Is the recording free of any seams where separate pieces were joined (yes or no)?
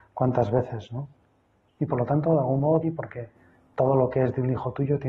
no